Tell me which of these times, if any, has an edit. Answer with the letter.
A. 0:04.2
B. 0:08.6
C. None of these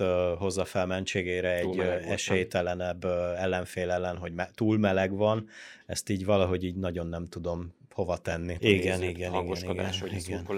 B